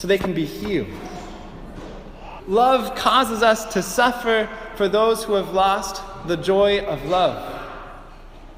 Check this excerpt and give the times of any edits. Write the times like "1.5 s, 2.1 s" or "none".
2.4 s